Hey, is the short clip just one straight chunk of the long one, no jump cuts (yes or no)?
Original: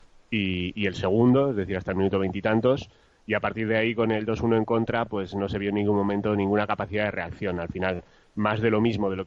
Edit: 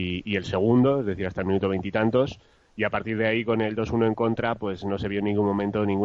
yes